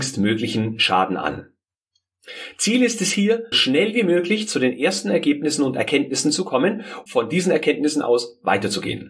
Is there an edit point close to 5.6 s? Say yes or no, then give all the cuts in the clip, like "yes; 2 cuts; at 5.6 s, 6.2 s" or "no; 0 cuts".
no; 2 cuts; at 3.5 s, 7.1 s